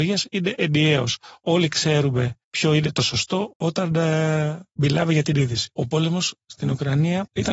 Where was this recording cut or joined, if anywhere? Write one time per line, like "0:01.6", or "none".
0:03.5